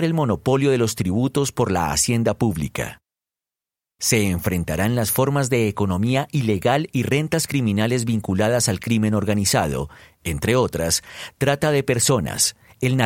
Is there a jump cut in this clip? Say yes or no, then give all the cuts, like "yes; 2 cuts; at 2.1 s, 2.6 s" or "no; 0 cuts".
no; 0 cuts